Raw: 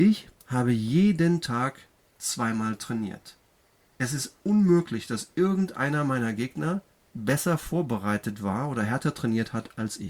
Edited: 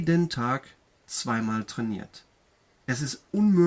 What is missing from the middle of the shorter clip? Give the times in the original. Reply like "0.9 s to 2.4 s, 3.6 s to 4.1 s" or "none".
none